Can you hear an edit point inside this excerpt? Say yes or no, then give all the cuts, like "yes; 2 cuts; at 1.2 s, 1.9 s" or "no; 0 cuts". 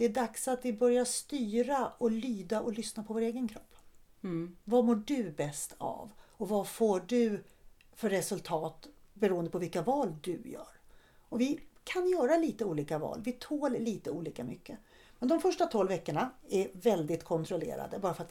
no; 0 cuts